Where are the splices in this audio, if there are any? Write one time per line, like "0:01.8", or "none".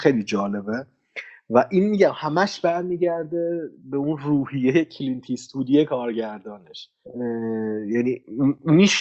0:03.8